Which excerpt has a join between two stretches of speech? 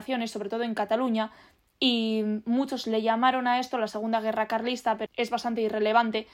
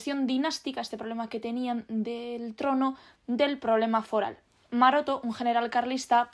first; 1 cut; at 5.1 s

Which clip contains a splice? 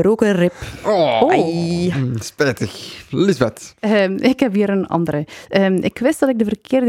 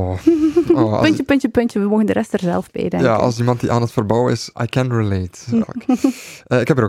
second; 2 cuts; at 4.5 s, 5.6 s

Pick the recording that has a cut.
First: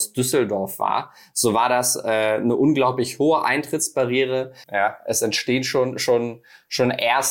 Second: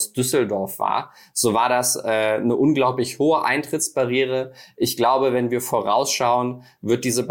first; 1 cut; at 4.6 s

